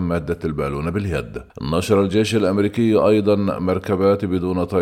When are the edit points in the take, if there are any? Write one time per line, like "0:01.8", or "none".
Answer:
0:01.5